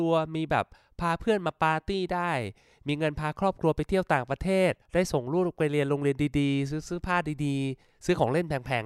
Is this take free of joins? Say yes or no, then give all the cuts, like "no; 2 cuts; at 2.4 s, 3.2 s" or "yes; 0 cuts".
no; 1 cut; at 4.8 s